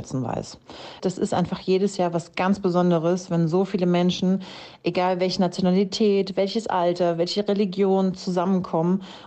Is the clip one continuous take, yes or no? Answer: no